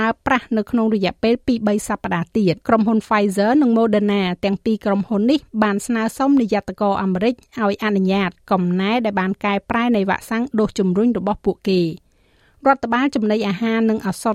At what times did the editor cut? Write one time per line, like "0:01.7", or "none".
0:02.6